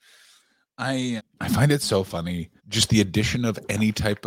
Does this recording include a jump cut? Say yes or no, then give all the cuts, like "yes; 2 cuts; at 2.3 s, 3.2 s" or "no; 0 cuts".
yes; 2 cuts; at 1.2 s, 2.6 s